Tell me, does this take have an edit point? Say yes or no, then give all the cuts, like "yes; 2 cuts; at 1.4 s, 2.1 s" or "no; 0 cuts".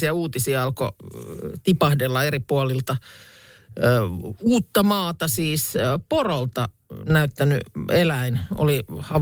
no; 0 cuts